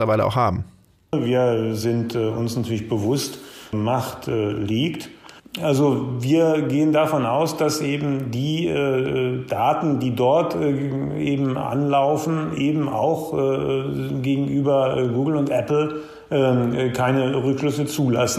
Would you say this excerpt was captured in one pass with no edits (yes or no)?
no